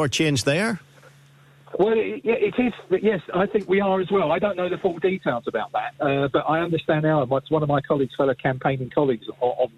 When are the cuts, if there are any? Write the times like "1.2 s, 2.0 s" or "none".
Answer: none